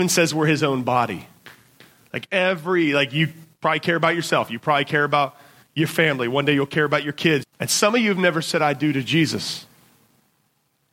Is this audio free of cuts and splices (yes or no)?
no